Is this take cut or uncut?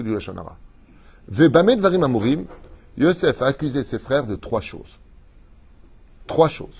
uncut